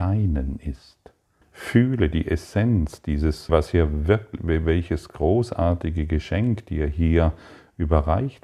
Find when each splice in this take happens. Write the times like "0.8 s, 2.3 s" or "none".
1.4 s, 3.5 s